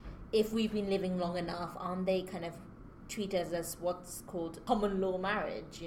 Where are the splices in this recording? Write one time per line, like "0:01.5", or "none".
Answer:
none

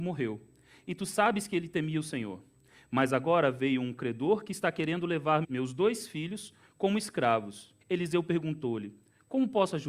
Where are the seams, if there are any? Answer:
0:05.4
0:07.8

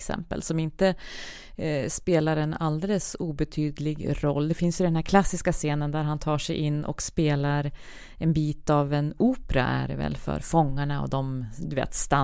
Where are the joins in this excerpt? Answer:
none

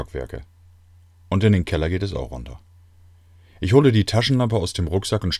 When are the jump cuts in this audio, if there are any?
none

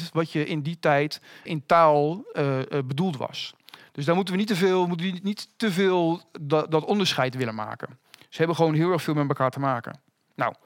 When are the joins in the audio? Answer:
0:01.5

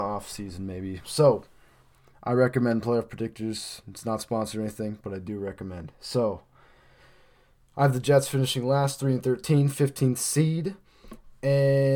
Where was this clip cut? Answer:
0:01.0

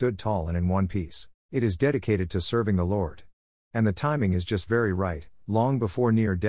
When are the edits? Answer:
0:01.4

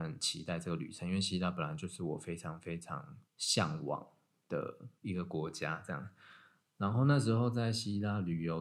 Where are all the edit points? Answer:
none

